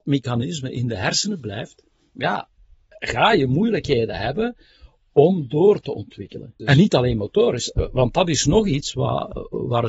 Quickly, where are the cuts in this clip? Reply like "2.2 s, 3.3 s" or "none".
6.6 s

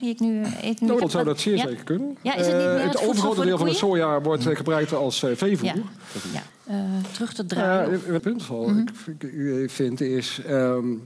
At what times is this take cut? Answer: 1.0 s, 6.5 s, 8.2 s

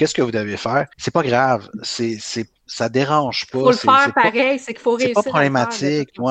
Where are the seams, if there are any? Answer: 0.9 s

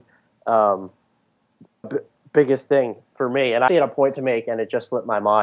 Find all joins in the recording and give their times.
1.8 s, 3.7 s

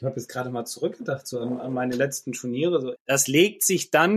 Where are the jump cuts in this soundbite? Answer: 3.0 s

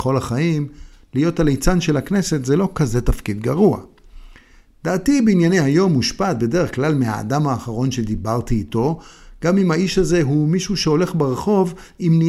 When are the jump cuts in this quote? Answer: 4.7 s

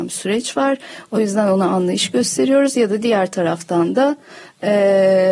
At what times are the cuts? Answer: none

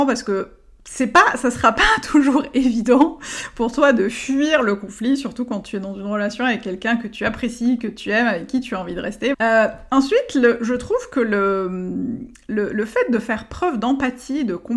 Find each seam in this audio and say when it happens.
9.3 s

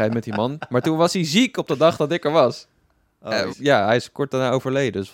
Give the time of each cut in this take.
3.5 s

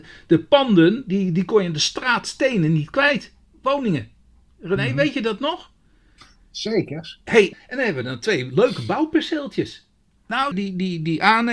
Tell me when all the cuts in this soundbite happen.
7.5 s, 10.5 s

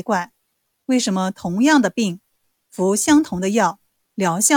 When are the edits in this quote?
none

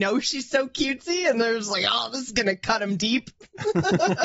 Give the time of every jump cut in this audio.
none

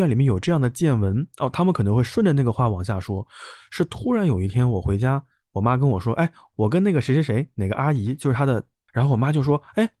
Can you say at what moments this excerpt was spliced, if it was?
8.9 s

